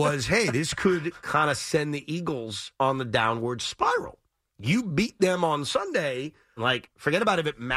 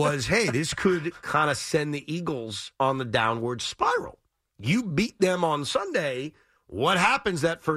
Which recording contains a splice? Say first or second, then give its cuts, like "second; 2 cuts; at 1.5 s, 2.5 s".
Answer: first; 1 cut; at 6.6 s